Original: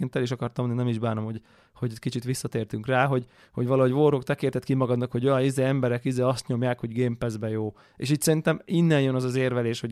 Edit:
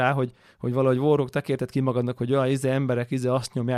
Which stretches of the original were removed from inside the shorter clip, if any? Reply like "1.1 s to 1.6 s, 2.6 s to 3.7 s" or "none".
none